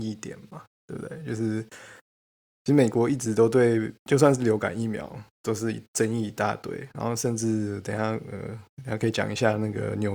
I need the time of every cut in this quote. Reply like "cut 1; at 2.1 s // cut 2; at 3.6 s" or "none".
none